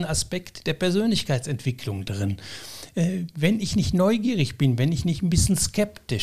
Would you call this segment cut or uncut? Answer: uncut